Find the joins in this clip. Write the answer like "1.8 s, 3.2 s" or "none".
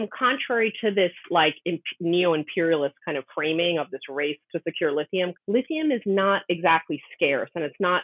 5.3 s